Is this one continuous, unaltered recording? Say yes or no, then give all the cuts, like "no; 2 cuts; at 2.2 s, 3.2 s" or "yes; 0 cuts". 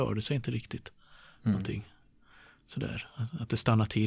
yes; 0 cuts